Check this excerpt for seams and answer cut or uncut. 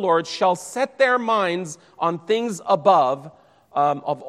uncut